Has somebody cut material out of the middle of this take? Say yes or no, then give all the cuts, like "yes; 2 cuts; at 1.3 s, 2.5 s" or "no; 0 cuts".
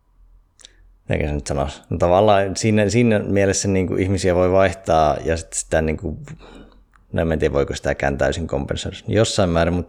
no; 0 cuts